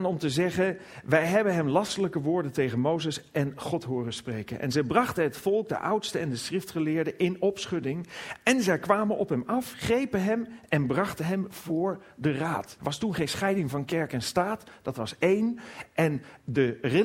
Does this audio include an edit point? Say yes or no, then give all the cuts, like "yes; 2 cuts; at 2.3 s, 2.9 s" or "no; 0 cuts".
yes; 1 cut; at 12.8 s